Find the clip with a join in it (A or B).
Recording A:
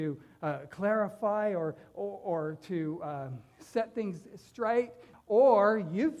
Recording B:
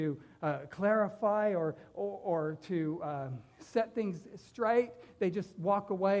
A